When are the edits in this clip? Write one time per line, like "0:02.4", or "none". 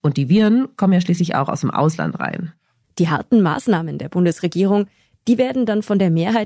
0:02.8